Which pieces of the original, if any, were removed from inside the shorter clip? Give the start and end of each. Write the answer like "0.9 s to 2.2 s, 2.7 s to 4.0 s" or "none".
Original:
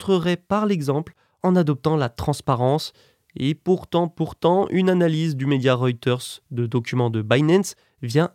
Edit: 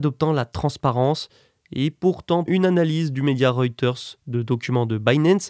4.1 s to 4.7 s